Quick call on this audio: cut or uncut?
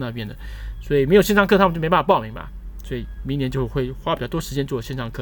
uncut